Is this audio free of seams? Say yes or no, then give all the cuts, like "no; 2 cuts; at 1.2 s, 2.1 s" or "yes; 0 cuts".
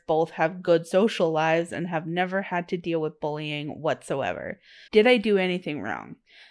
no; 1 cut; at 4.9 s